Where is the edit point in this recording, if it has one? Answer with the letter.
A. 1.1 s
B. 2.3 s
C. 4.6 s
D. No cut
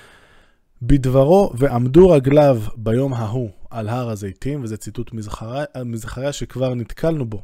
D